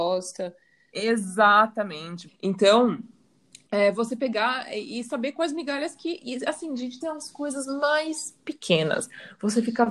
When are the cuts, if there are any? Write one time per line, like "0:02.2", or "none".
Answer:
0:02.3
0:07.0